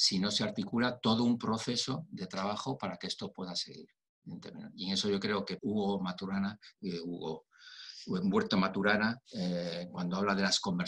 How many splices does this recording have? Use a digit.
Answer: 2